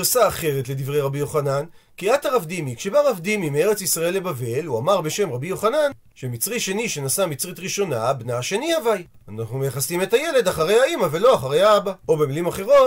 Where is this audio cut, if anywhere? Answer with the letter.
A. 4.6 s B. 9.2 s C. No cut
B